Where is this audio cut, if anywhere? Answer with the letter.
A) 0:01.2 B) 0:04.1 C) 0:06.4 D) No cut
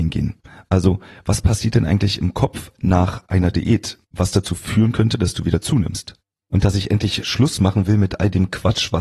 C